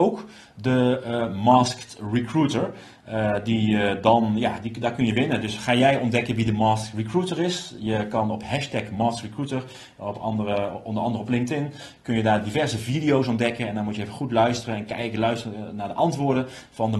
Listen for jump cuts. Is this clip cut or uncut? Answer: uncut